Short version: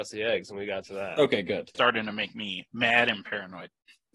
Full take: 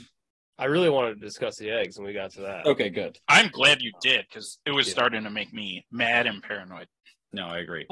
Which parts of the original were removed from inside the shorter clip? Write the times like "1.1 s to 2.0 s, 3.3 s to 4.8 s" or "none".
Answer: 3.2 s to 4.9 s